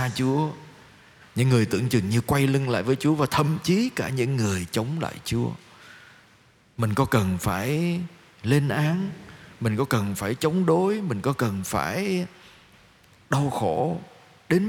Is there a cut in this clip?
no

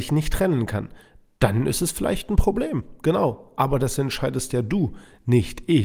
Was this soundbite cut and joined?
no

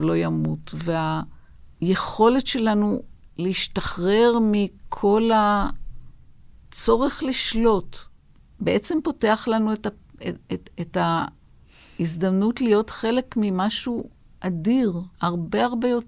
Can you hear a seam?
yes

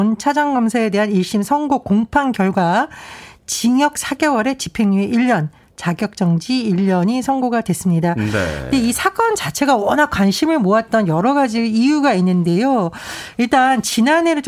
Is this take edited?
no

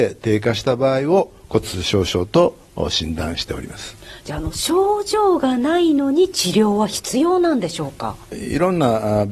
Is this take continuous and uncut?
yes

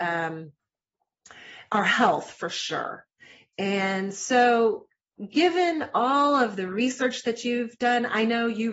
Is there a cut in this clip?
no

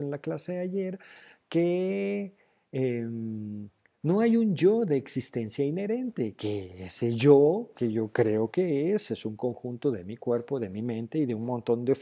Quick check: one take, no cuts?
yes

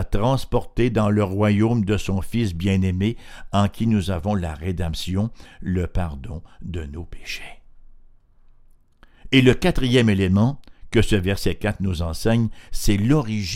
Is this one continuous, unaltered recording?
yes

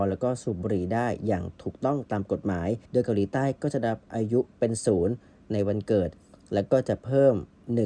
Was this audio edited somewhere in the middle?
yes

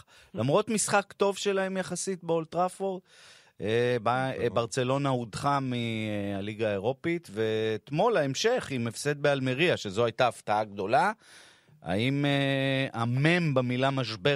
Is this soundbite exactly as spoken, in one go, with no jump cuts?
yes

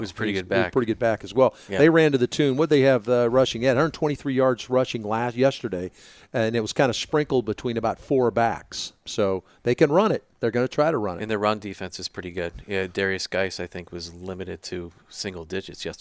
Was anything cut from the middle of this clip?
no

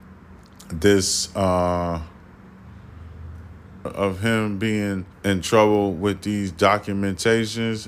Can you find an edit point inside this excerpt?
yes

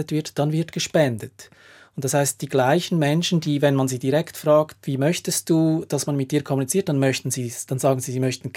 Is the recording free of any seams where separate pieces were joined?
yes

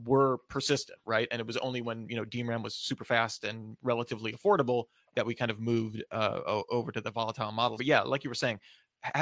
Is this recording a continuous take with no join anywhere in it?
no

